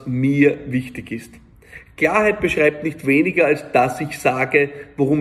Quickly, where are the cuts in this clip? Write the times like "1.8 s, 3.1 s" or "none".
none